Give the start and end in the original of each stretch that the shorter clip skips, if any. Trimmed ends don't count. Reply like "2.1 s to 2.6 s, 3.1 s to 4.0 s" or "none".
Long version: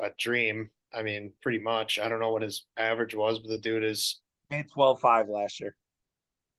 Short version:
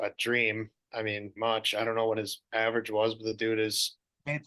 1.4 s to 1.6 s